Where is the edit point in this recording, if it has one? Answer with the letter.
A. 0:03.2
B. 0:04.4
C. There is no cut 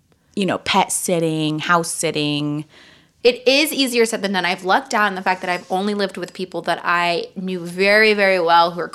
A